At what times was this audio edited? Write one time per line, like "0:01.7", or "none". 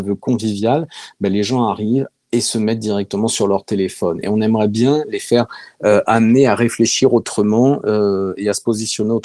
none